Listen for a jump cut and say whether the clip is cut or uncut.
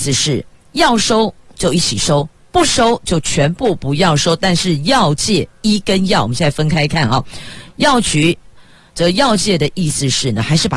uncut